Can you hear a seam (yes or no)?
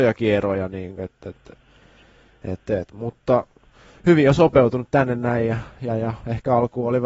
no